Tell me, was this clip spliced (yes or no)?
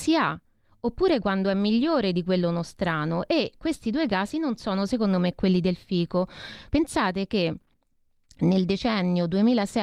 yes